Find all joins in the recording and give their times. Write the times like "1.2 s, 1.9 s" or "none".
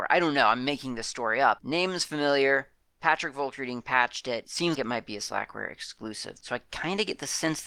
1.6 s, 4.8 s, 6.4 s